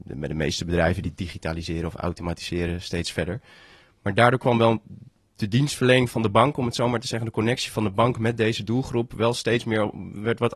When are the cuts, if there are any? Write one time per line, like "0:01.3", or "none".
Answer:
none